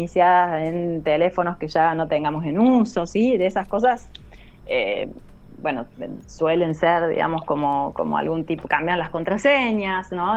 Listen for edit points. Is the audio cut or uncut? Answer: uncut